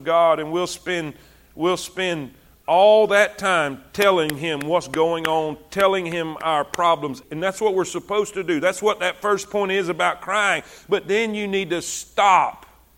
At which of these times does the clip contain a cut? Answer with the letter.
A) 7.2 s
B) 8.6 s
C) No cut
A